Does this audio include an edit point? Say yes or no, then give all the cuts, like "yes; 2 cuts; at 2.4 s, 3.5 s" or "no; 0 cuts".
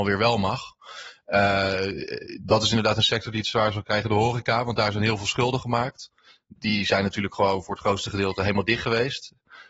no; 0 cuts